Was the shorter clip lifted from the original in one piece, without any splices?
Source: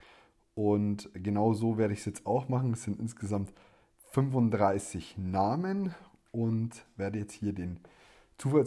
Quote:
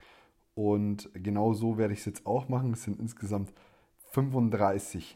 yes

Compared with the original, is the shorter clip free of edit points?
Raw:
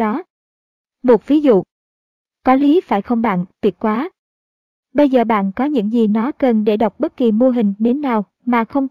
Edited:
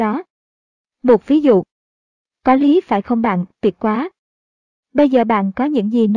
yes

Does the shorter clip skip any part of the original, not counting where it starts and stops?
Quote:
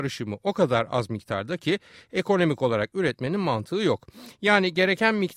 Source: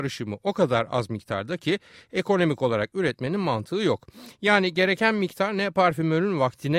no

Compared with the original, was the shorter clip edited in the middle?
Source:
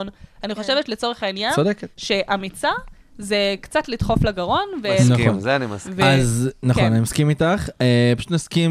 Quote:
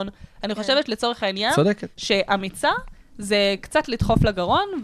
no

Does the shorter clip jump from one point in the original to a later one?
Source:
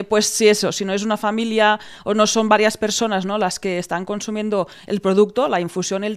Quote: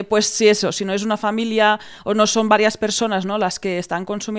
no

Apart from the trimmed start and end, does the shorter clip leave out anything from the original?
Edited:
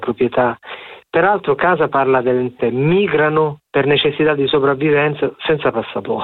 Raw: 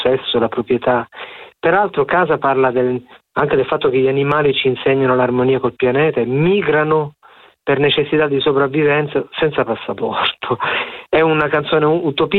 yes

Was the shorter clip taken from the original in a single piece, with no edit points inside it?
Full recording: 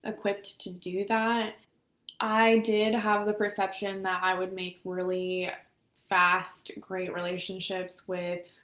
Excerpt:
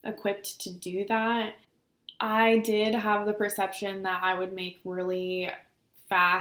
yes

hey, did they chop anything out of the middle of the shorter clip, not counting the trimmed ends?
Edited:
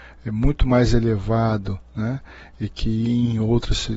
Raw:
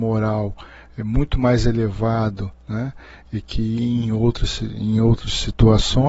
no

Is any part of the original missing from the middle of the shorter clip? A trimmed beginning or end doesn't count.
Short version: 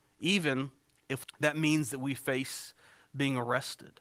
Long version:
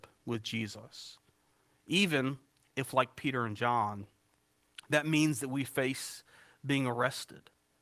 yes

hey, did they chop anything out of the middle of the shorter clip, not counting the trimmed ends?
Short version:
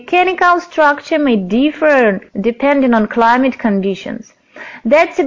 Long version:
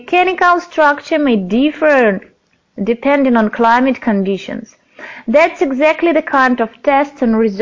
yes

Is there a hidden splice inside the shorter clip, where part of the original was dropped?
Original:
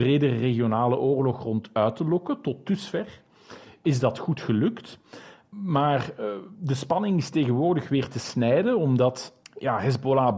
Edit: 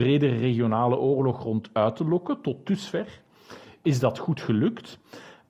no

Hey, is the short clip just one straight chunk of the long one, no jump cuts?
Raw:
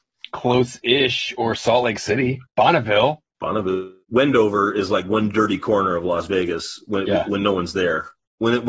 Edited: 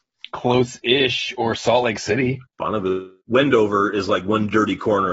no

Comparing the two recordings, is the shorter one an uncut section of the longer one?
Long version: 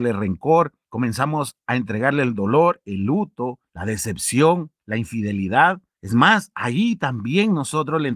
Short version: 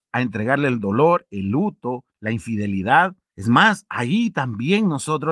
no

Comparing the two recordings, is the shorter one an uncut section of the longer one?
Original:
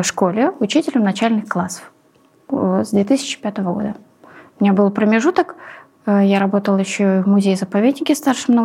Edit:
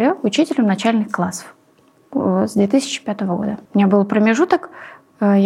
no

